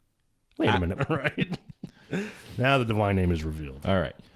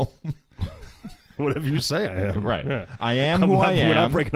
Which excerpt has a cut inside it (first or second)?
first